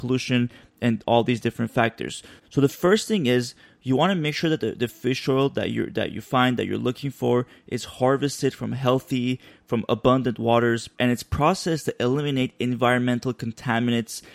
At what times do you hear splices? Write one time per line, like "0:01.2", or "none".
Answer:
0:02.4

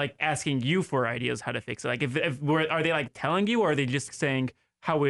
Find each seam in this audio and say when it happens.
0:03.1
0:04.1

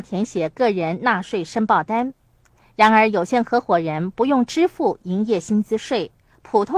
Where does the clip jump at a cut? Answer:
none

